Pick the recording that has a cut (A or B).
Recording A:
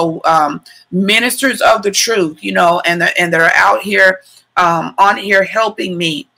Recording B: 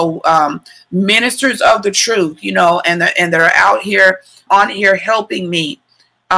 B